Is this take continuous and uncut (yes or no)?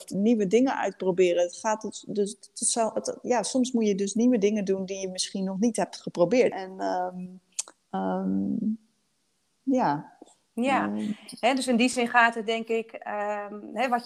no